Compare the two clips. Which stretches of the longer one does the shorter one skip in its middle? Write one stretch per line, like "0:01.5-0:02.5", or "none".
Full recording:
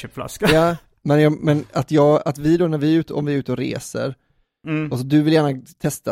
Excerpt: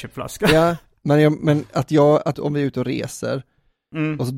0:02.3-0:03.1